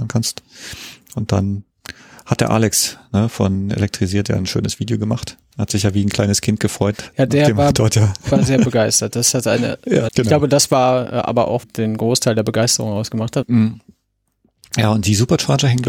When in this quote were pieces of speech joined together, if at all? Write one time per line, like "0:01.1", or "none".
0:10.1
0:11.6
0:13.4